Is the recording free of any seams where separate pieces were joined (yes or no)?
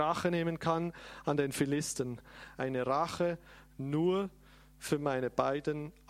yes